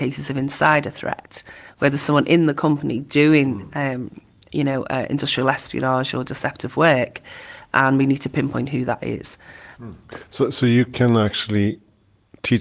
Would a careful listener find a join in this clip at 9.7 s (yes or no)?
yes